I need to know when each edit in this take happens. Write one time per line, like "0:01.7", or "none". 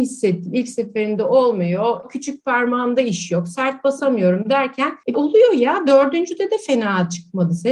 0:02.0
0:05.1